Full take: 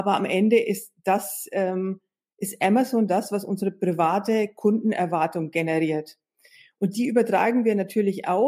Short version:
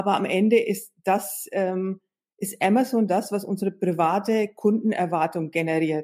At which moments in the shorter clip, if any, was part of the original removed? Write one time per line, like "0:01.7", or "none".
none